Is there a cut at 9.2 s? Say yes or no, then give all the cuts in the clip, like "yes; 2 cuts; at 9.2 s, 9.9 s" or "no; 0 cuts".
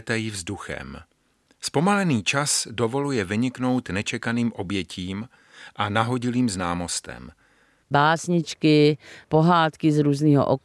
yes; 2 cuts; at 7.8 s, 9.2 s